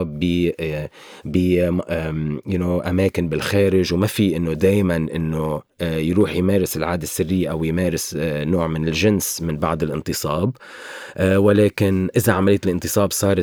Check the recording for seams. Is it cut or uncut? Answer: uncut